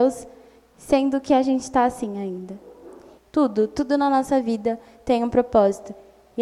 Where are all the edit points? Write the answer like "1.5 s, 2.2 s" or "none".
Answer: 3.2 s